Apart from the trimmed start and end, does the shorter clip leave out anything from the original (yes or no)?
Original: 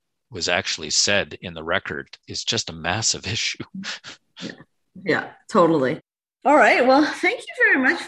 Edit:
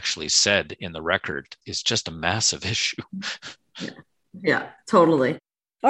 no